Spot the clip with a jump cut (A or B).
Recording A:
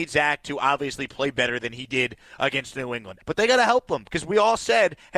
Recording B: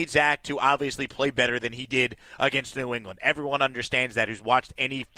A